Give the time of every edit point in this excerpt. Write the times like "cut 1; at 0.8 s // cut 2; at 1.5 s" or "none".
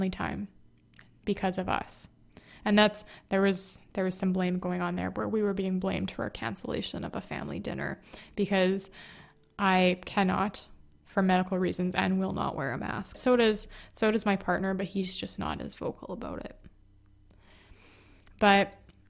cut 1; at 13.1 s